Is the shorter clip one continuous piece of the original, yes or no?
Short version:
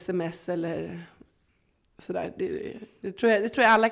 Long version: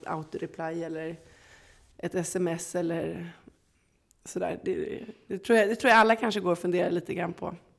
yes